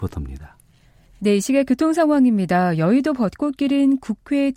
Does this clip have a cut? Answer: no; 0 cuts

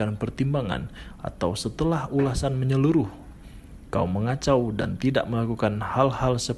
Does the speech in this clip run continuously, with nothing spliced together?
yes; 0 cuts

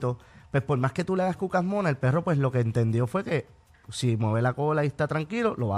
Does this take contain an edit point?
no; 0 cuts

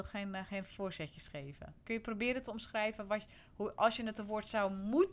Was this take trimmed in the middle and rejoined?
no; 0 cuts

